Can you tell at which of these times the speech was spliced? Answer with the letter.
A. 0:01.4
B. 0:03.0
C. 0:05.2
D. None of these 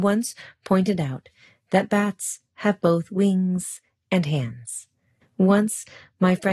C